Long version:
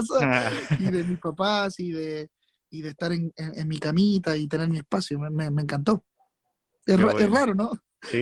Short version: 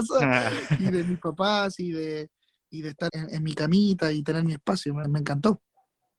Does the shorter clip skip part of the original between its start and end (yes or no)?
yes